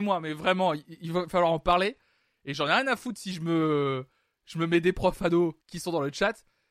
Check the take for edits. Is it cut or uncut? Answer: cut